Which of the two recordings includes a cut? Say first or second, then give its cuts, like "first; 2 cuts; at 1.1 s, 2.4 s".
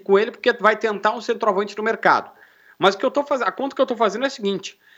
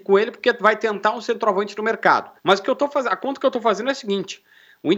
second; 1 cut; at 2.4 s